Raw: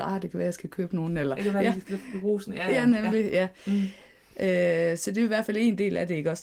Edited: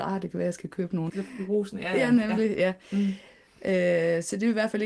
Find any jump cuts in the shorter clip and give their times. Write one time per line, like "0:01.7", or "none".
0:01.1